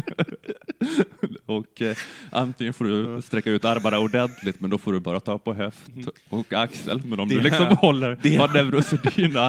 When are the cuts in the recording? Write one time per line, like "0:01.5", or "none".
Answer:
none